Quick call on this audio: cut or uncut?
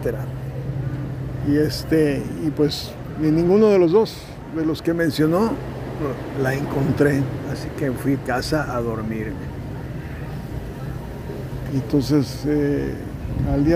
uncut